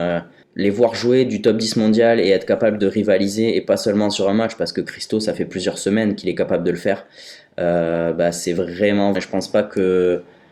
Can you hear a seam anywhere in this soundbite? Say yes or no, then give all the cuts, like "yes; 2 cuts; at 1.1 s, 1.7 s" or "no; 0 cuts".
yes; 1 cut; at 9.1 s